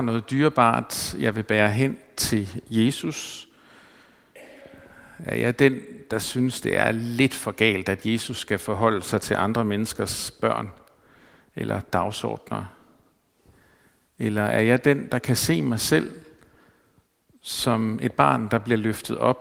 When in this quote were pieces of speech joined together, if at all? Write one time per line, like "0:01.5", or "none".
none